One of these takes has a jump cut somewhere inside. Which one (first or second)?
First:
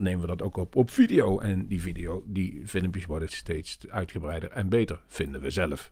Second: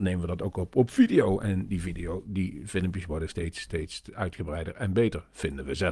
first